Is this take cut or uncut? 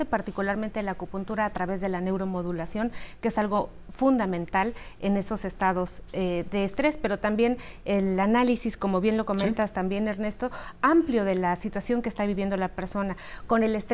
uncut